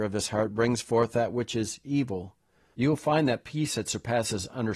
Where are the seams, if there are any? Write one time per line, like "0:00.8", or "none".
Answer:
0:02.7

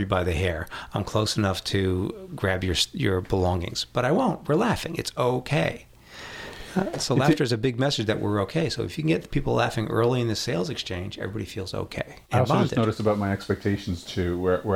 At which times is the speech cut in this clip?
0:12.2

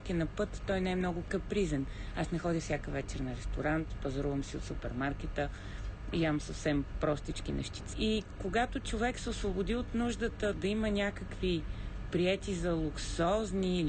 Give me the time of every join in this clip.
0:07.9
0:10.5

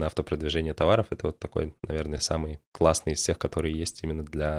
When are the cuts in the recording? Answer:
none

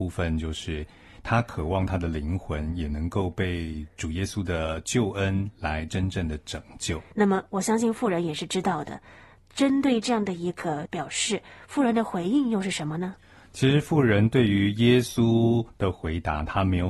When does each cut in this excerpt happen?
0:07.1

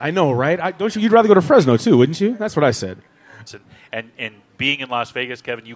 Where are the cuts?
0:03.5

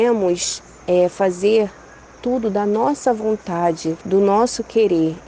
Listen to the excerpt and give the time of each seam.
0:04.0

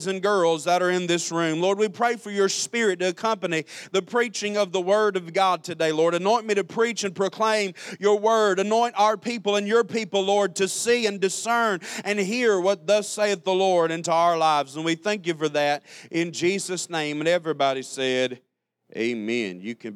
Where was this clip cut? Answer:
none

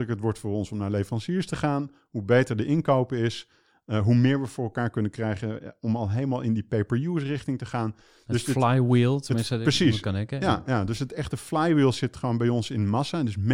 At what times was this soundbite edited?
none

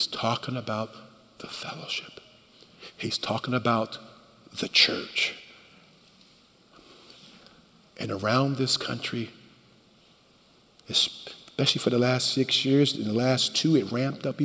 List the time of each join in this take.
none

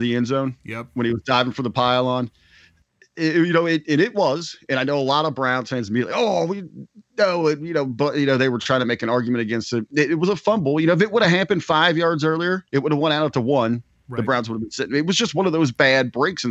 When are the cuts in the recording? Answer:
none

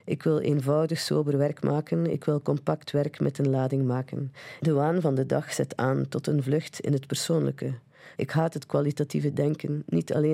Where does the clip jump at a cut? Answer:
0:04.6
0:08.1

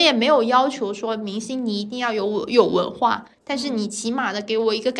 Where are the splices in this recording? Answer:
none

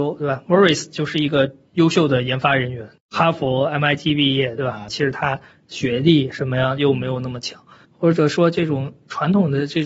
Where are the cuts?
0:04.9
0:07.8

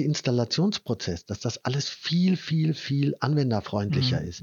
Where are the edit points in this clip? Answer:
none

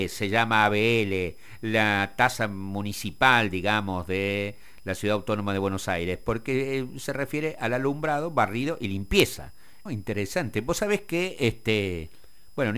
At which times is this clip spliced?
0:09.9

